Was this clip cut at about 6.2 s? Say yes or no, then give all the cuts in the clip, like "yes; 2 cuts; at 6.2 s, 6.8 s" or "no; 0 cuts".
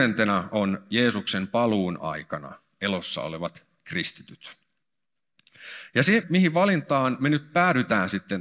yes; 1 cut; at 6.2 s